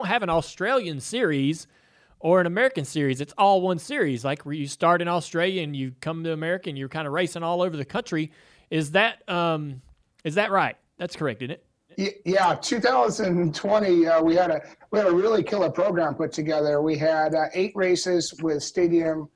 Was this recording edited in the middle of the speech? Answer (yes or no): no